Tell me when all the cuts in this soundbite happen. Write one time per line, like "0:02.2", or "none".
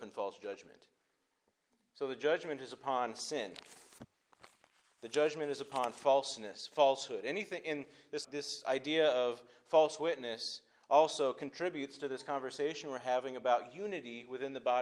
0:08.2